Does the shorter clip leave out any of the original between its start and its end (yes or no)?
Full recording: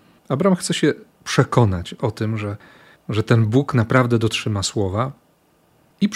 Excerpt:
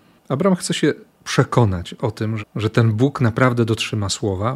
yes